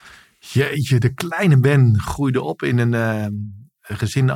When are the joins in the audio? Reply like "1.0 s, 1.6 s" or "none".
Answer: none